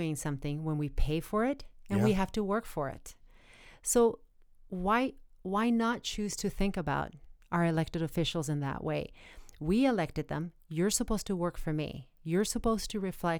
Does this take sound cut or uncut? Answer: uncut